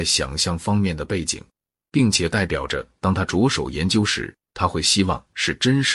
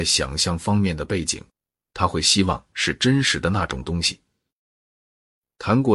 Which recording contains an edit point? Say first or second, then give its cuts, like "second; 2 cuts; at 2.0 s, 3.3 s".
second; 1 cut; at 1.9 s